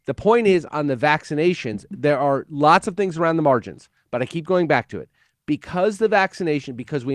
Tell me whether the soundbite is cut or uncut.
uncut